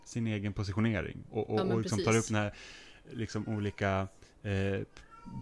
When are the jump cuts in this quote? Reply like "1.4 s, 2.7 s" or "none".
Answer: 1.3 s